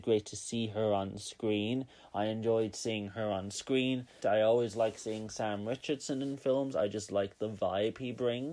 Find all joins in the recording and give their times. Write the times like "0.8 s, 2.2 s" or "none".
4.2 s